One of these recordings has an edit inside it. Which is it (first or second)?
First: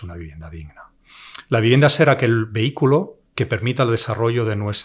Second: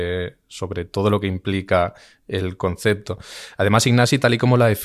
first